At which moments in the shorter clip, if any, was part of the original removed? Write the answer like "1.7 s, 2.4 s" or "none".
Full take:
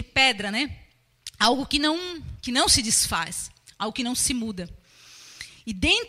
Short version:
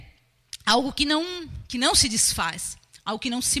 none